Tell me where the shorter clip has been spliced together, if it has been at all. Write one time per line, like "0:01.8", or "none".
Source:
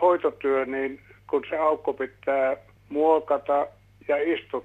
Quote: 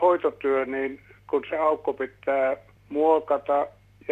none